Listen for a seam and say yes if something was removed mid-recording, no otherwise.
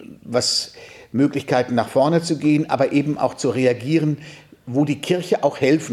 no